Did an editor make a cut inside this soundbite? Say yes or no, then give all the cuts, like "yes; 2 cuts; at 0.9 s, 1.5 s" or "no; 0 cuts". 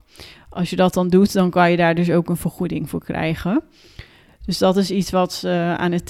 no; 0 cuts